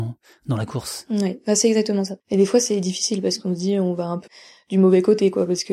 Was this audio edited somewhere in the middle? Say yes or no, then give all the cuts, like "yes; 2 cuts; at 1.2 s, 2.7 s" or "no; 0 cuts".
yes; 2 cuts; at 2.2 s, 4.3 s